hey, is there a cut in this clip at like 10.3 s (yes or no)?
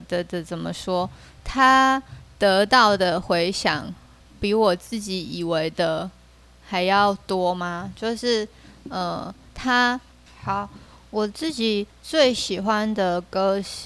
yes